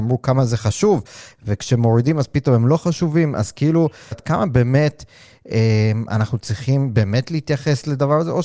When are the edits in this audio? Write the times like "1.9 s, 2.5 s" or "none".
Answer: 4.1 s